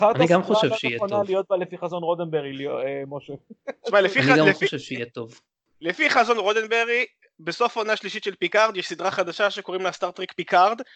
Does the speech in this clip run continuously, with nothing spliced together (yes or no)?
yes